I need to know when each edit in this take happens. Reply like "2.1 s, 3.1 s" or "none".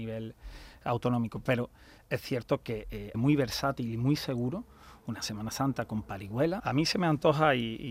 3.1 s, 6.6 s